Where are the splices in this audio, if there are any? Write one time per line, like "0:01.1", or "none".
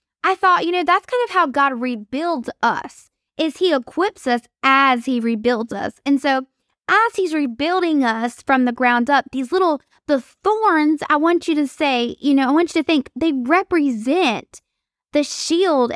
none